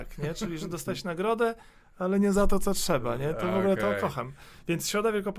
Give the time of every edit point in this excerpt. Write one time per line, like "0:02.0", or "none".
none